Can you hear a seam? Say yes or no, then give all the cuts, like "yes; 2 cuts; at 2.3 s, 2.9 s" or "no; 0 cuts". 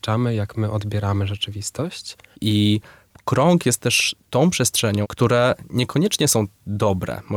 yes; 2 cuts; at 2.3 s, 5.0 s